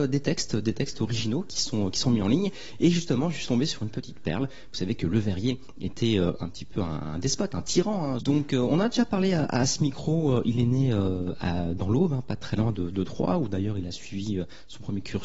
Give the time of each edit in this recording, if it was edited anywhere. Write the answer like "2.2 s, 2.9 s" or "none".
8.2 s